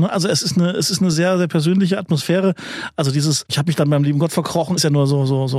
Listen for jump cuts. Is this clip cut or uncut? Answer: uncut